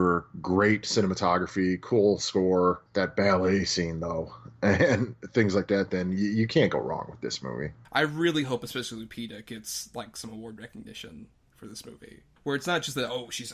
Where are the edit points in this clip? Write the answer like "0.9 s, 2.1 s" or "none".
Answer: 7.8 s, 12.4 s